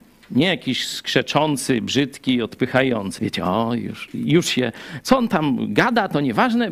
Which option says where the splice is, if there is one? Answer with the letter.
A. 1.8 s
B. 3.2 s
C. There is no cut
B